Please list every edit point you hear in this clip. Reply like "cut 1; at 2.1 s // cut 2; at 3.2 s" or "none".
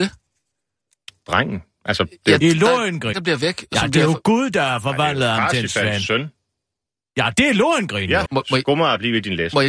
cut 1; at 3.1 s // cut 2; at 8.3 s